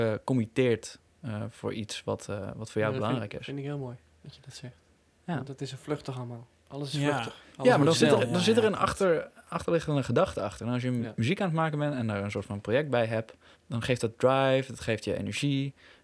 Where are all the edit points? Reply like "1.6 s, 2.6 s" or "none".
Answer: 13.5 s

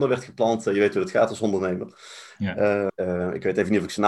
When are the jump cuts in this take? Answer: 2.9 s

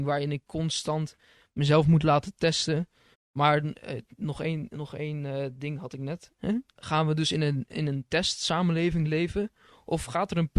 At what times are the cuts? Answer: 3.1 s, 6.4 s

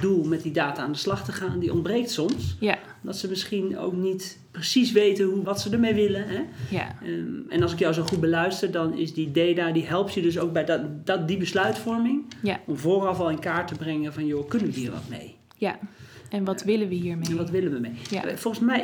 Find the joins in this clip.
5.5 s

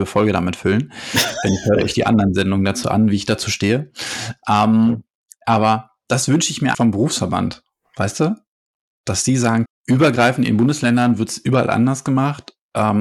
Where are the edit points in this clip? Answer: 6.7 s, 9.7 s

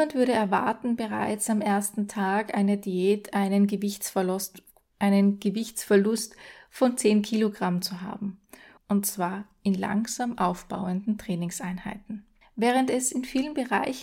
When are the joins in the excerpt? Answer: 8.8 s, 12.4 s

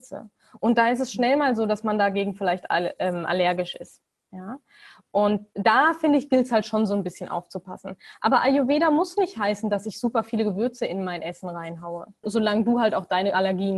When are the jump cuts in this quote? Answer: 12.2 s

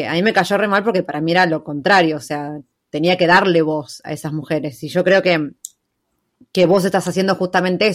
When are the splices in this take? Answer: none

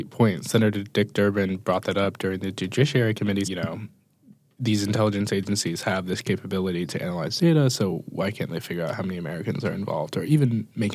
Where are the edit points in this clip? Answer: 3.4 s

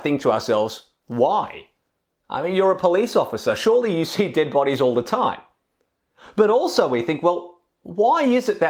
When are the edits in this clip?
1.0 s

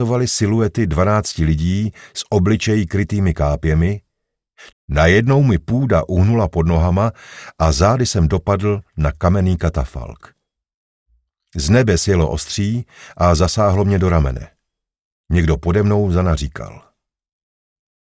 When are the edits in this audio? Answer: 4.7 s

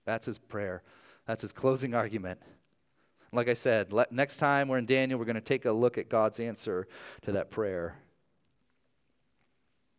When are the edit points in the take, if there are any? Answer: none

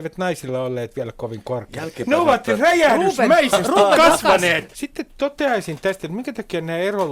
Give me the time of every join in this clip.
4.7 s

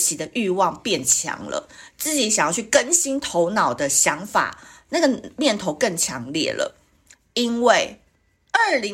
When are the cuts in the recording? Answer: none

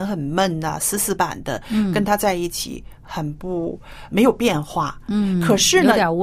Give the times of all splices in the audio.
1.2 s, 4.1 s

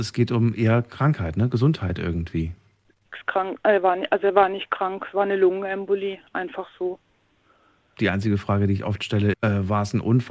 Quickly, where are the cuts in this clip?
8.0 s, 9.3 s

